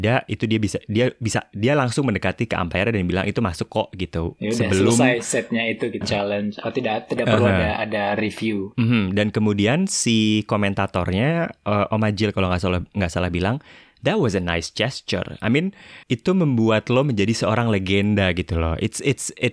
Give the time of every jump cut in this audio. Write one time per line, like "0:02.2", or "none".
0:06.0
0:16.0